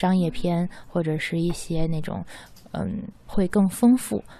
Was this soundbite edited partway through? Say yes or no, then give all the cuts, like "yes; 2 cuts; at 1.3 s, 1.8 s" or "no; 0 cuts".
yes; 1 cut; at 3.3 s